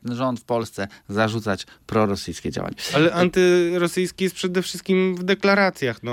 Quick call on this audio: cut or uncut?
uncut